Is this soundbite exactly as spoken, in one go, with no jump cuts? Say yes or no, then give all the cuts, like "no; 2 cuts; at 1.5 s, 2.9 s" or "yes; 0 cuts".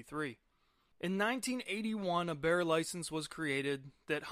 no; 1 cut; at 0.9 s